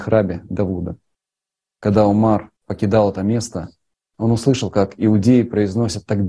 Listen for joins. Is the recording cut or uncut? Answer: cut